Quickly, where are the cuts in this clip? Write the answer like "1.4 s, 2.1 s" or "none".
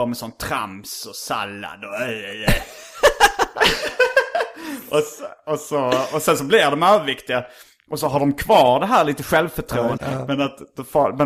10.0 s